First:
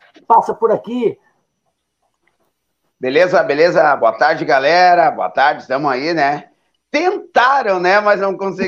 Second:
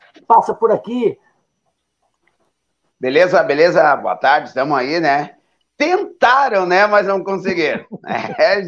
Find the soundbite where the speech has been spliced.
second; 1 cut; at 4.0 s

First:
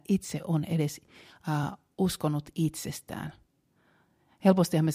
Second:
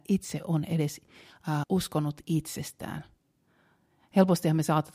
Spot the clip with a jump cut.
second; 1 cut; at 1.6 s

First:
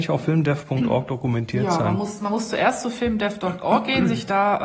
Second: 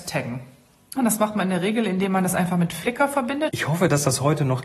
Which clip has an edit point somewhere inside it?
second; 2 cuts; at 1.0 s, 3.5 s

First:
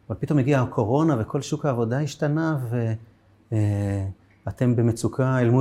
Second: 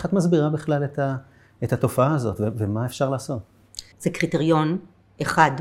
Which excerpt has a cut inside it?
second; 1 cut; at 3.9 s

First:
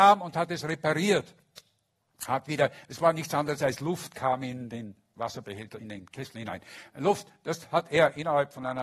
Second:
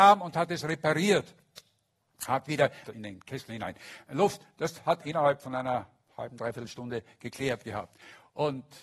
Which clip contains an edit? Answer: second; 2 cuts; at 2.9 s, 5.0 s

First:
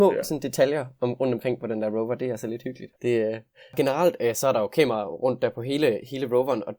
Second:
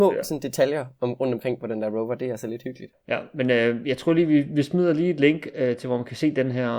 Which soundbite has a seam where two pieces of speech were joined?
first; 1 cut; at 3.0 s

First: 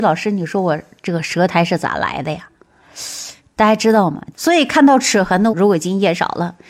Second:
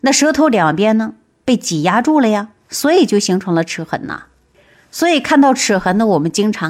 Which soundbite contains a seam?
first; 2 cuts; at 4.3 s, 5.5 s

